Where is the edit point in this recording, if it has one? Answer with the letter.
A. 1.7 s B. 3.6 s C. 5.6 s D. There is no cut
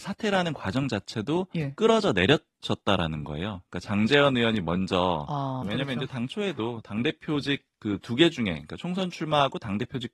C